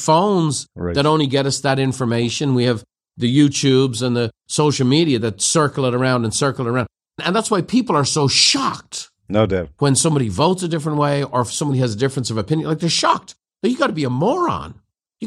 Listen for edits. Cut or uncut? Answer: uncut